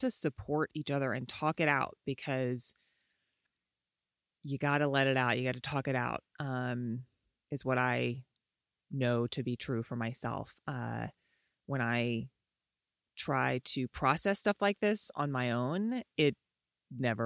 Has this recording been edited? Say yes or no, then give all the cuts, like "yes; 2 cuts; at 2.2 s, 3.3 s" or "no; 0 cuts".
no; 0 cuts